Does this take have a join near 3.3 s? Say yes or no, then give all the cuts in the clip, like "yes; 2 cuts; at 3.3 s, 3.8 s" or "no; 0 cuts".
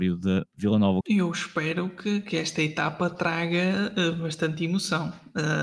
no; 1 cut; at 1.0 s